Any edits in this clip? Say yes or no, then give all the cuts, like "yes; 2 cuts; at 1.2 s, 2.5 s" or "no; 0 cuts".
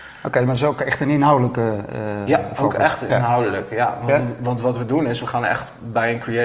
no; 0 cuts